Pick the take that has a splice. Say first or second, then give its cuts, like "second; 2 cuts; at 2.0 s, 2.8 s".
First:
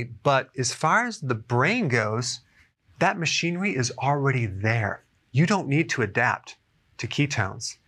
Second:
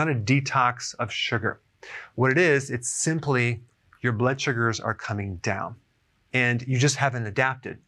second; 1 cut; at 6.2 s